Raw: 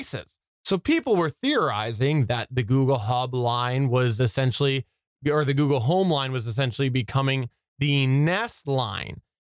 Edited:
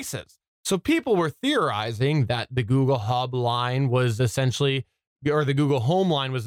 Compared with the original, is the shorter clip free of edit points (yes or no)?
yes